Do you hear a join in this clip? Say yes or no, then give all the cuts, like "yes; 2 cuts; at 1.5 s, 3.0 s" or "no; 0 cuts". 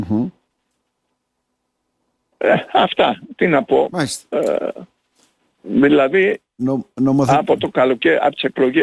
no; 0 cuts